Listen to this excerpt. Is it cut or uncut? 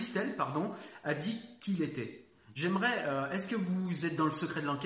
uncut